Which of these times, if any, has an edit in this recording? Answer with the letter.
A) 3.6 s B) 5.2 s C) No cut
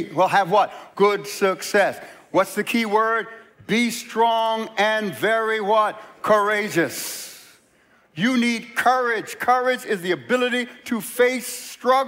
C